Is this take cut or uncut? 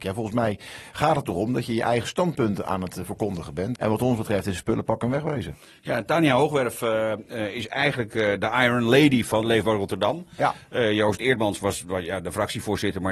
cut